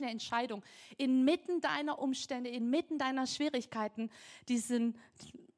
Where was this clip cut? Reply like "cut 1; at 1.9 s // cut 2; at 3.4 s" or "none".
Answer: none